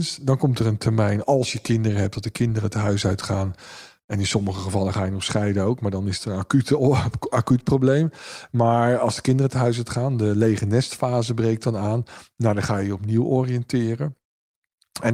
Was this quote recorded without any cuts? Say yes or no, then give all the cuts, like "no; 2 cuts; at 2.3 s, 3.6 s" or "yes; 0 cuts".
yes; 0 cuts